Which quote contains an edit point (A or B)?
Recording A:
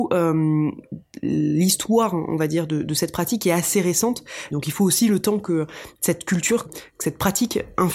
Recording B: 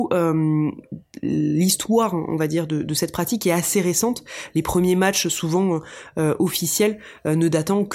A